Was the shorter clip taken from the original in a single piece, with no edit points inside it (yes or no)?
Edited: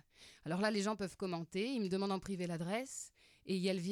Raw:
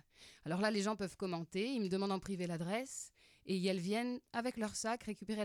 yes